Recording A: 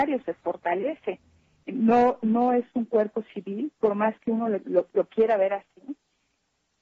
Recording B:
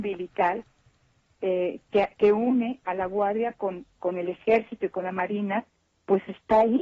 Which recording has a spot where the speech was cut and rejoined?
A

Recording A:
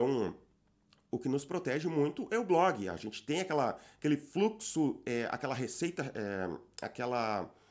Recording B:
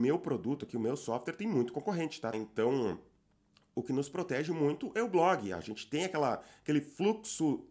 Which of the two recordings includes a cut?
B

